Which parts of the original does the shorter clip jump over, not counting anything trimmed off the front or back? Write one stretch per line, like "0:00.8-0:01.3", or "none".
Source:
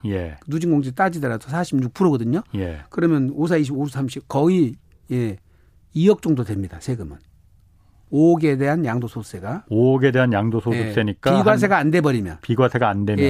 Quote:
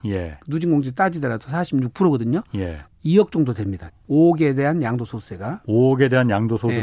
0:02.9-0:05.8
0:06.8-0:07.9